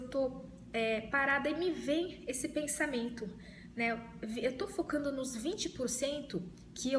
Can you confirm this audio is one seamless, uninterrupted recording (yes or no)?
yes